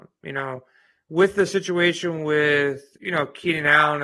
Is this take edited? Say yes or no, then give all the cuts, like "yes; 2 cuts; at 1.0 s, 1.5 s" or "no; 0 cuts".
no; 0 cuts